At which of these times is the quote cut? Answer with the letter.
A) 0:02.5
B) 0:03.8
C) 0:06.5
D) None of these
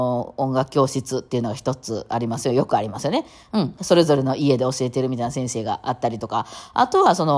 B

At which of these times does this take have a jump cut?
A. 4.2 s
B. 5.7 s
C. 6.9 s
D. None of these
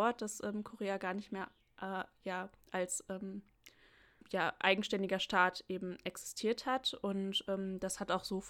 A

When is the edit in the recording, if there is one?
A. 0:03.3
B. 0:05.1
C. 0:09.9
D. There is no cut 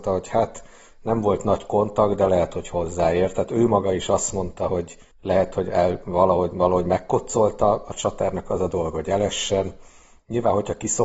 B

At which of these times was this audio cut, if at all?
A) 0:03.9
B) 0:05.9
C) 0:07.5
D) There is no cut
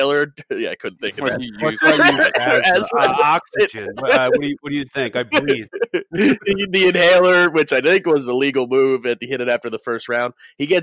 D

